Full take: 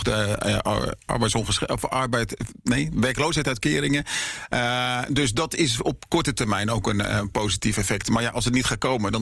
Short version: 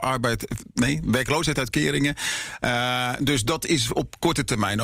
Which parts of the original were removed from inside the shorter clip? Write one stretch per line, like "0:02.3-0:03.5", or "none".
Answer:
none